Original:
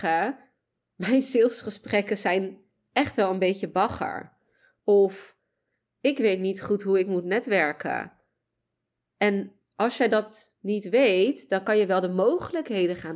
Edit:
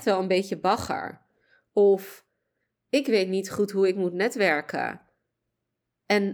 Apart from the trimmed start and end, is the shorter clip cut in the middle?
no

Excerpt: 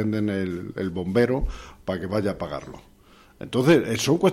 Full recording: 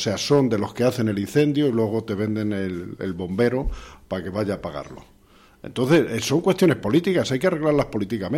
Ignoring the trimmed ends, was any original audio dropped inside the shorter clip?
no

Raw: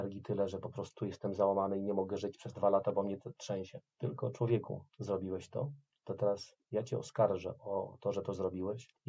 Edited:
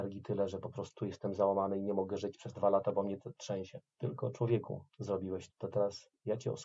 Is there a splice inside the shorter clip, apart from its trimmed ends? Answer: yes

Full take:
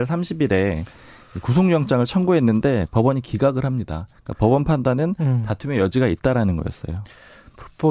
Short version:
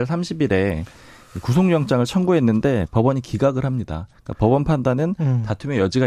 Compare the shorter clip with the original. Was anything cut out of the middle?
no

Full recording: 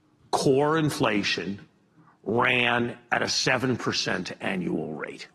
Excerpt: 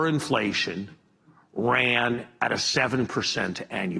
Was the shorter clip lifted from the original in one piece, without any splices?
yes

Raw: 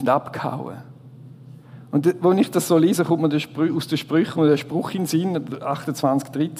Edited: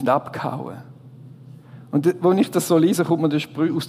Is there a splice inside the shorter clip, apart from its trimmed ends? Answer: no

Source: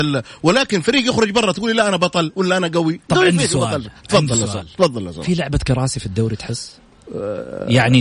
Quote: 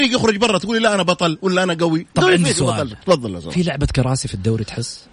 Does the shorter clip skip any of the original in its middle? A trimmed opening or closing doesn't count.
yes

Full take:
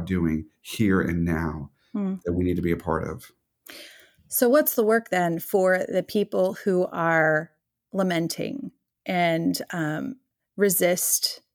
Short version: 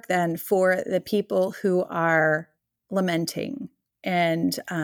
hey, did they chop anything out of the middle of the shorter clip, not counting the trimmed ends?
no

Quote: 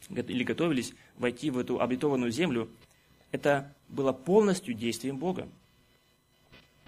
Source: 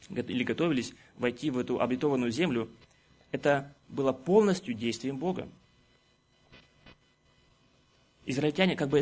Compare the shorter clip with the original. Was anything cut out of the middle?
no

